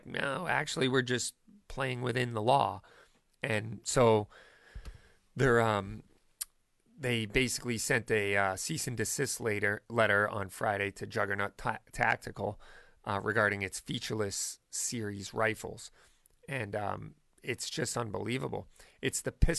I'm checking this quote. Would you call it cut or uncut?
uncut